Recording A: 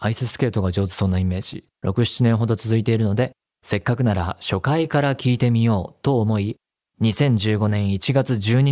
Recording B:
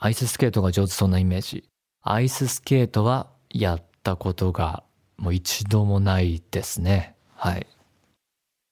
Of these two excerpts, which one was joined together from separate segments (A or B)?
A